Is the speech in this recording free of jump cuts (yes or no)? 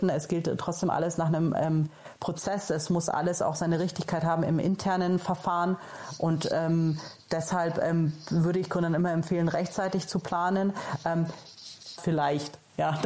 no